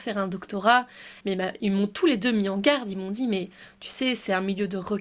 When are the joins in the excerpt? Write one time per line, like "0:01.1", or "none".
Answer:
0:01.2